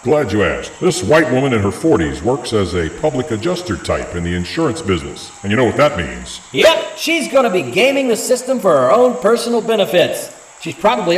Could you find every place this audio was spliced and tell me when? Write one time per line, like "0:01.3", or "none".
none

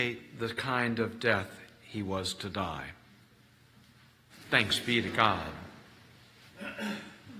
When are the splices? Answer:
0:04.3

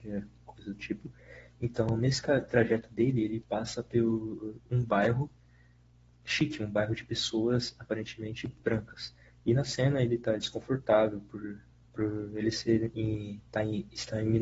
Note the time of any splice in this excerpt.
0:11.8

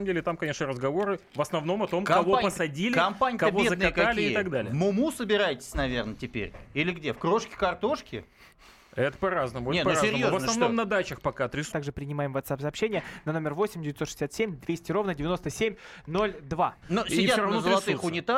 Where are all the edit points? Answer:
0:11.7
0:16.8

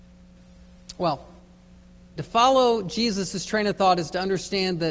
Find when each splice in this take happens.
0:02.2

